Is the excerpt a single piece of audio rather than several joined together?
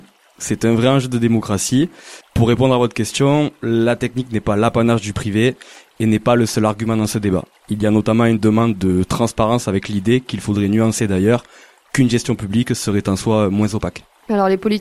no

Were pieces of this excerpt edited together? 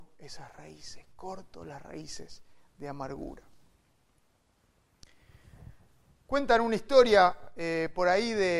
no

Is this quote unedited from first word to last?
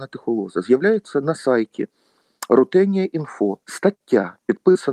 no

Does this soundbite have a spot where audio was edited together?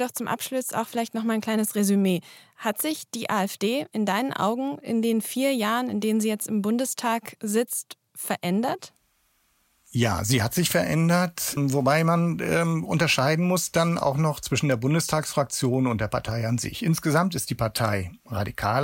yes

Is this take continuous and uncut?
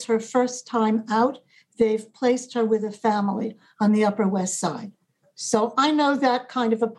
yes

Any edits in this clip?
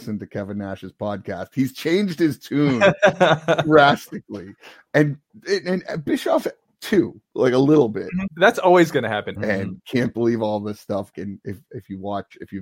yes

